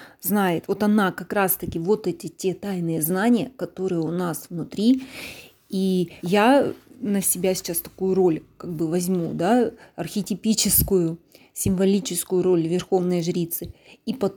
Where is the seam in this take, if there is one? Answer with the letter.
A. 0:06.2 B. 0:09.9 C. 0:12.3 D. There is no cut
A